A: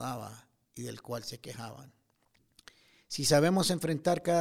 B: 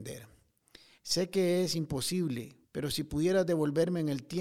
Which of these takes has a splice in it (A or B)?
B